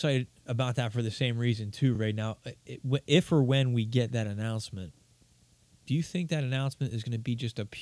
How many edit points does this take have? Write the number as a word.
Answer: zero